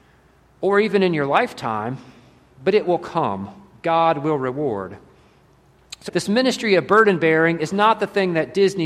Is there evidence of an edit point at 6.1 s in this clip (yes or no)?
yes